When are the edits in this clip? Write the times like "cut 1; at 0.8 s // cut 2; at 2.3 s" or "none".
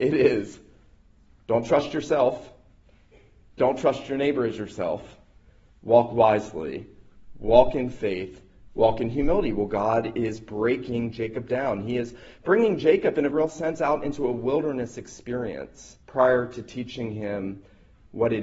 cut 1; at 13.3 s // cut 2; at 16.0 s